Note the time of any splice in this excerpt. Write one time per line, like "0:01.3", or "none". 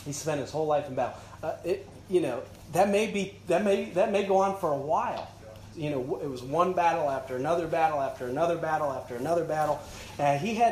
0:01.4
0:05.7